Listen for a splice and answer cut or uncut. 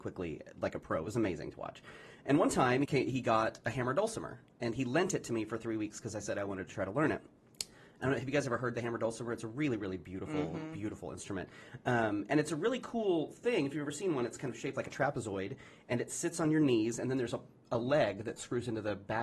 cut